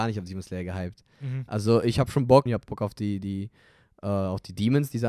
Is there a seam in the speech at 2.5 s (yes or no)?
yes